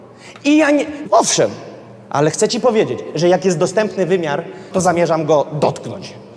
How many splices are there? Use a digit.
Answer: 2